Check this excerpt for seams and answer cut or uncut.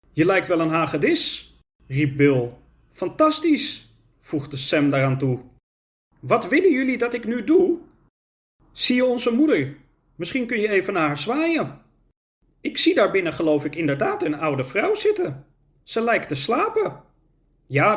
uncut